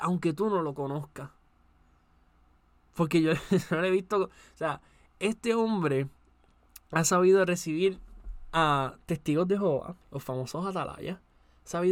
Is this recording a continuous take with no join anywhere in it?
no; 1 cut; at 10.0 s

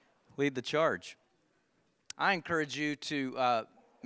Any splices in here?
yes; 1 cut; at 2.1 s

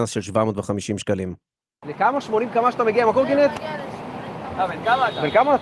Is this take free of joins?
no; 1 cut; at 1.8 s

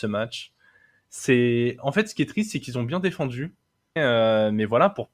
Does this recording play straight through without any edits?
no; 1 cut; at 4.0 s

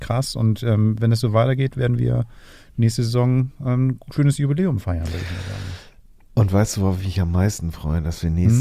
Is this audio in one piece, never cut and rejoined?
yes; 0 cuts

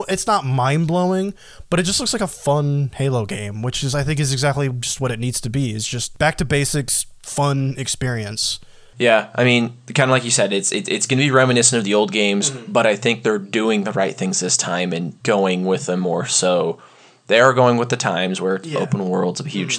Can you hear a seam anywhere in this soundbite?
no; 0 cuts

